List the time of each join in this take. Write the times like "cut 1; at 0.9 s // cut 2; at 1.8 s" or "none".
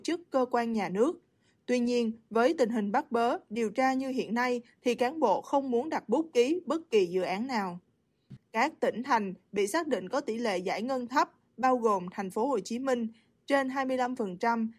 cut 1; at 8.4 s